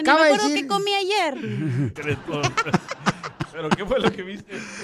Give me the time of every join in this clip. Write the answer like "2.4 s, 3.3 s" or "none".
2.0 s